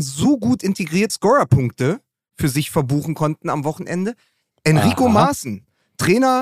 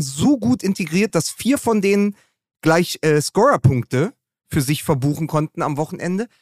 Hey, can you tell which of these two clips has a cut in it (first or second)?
first